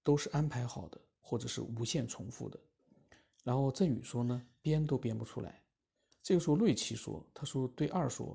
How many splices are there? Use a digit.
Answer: 1